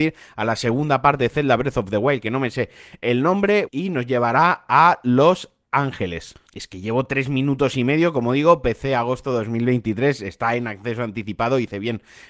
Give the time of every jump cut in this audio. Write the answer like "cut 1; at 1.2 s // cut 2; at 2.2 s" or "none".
cut 1; at 3.7 s // cut 2; at 6.5 s